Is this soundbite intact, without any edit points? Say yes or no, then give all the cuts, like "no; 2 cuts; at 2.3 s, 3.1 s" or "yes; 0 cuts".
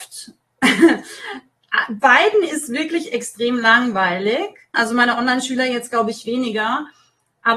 no; 1 cut; at 4.7 s